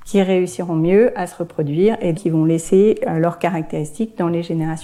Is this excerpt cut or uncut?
cut